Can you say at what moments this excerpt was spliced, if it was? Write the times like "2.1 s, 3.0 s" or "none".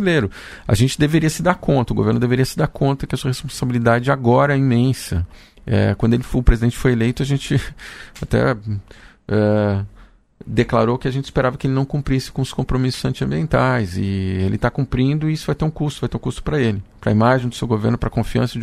none